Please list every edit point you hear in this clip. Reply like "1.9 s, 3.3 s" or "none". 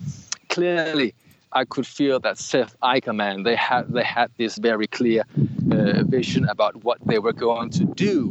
4.6 s